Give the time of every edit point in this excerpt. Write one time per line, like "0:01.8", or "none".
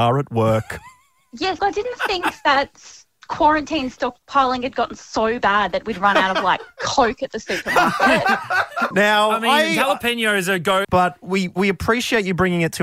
0:01.6
0:08.9
0:10.8